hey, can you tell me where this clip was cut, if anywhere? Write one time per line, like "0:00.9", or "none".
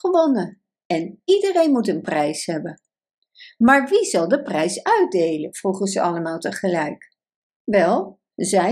none